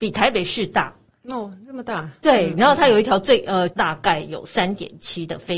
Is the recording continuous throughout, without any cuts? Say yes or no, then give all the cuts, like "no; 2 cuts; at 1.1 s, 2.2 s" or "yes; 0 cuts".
no; 1 cut; at 3.7 s